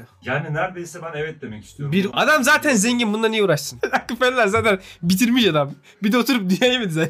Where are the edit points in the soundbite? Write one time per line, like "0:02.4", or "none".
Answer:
0:02.1